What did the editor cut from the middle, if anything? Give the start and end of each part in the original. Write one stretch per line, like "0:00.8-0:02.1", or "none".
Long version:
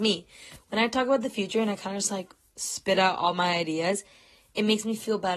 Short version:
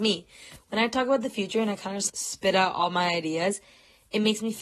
0:02.1-0:02.5